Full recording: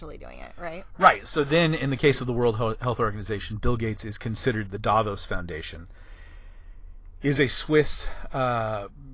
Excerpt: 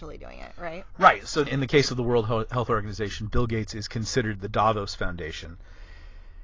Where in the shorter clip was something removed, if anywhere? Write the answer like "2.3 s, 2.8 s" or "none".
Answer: 1.5 s